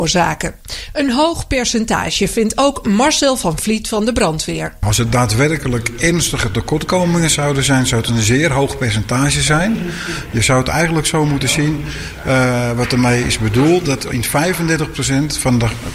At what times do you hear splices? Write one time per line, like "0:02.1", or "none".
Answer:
none